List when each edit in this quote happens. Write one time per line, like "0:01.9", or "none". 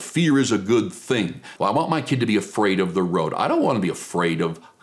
0:01.6